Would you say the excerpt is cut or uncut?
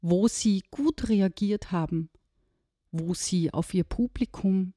uncut